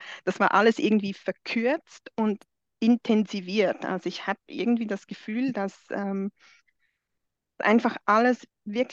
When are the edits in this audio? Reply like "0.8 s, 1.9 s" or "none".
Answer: none